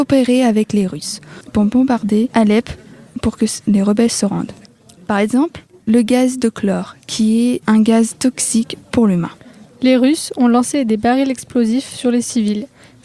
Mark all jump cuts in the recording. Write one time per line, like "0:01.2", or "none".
0:04.9